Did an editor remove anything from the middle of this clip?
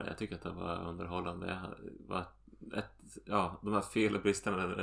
no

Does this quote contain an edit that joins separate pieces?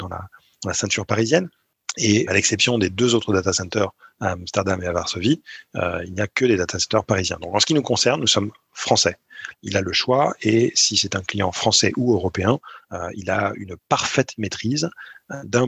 yes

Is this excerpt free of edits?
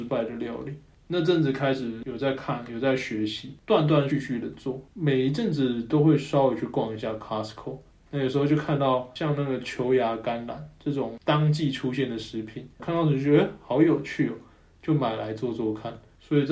no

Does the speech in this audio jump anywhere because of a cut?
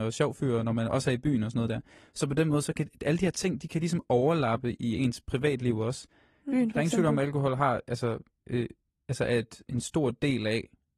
yes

